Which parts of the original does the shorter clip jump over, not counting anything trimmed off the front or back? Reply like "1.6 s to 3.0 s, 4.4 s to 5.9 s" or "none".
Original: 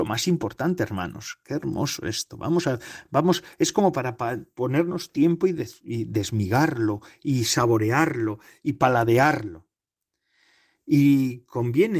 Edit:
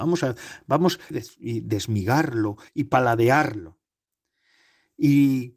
3.5 s to 5.5 s, 7.1 s to 8.6 s